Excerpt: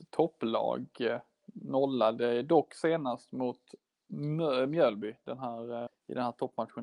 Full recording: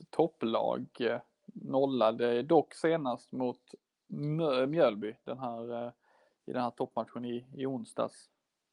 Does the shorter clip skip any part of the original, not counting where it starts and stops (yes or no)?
yes